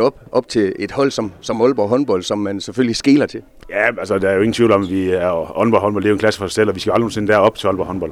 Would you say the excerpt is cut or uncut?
uncut